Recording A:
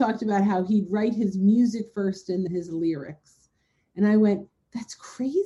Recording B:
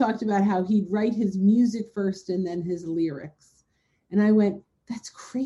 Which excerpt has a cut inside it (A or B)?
A